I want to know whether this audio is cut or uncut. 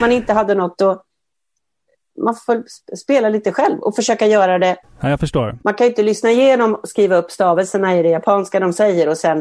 uncut